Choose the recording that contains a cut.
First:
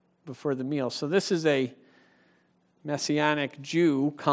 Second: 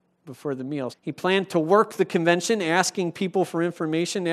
second; 1 cut; at 0.9 s

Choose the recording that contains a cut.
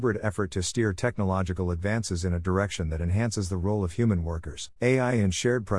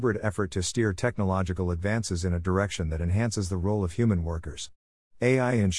first; 1 cut; at 4.8 s

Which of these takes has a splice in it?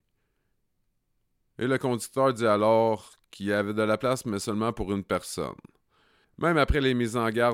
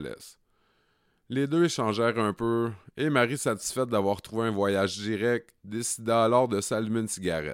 first; 1 cut; at 6.2 s

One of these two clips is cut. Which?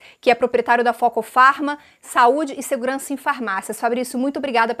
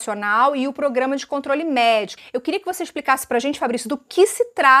second; 1 cut; at 2.2 s

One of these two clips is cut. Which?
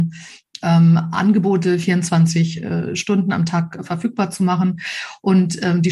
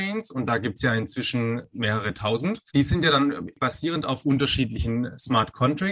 second; 1 cut; at 2.7 s

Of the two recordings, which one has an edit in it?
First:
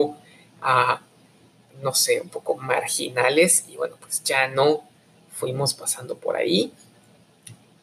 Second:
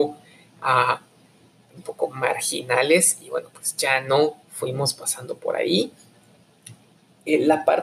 second; 2 cuts; at 1.8 s, 4.4 s

